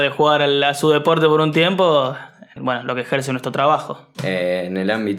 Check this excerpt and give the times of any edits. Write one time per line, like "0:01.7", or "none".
0:02.6
0:04.1